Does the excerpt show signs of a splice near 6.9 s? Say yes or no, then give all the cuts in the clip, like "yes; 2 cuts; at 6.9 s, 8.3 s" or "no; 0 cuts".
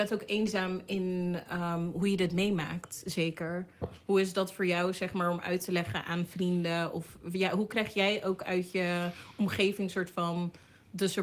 no; 1 cut; at 3.8 s